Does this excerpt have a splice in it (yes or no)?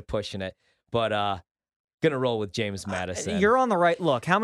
no